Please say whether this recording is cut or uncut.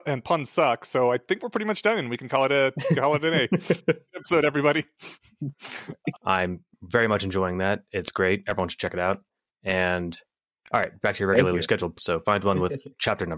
cut